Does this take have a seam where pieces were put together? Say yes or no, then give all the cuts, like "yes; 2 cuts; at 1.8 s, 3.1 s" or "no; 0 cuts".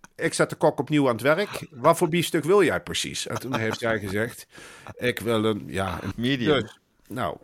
yes; 1 cut; at 6.1 s